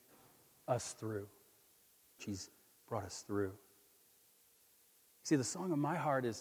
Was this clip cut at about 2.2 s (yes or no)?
yes